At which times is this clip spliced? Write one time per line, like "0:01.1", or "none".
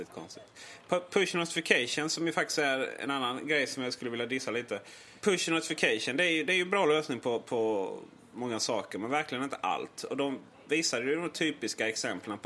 none